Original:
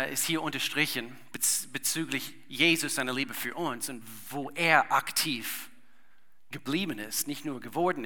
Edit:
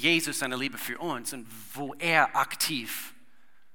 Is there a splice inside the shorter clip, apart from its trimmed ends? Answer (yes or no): no